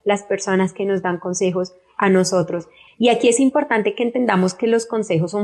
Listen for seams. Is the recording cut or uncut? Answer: cut